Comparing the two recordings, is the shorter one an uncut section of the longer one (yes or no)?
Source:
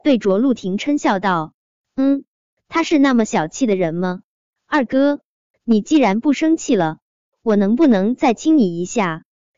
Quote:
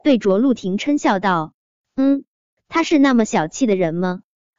yes